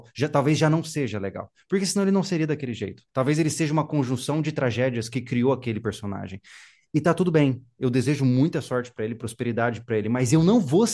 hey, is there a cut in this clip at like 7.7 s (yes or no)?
no